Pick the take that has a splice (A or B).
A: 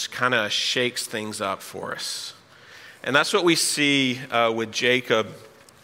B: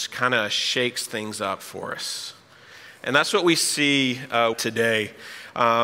B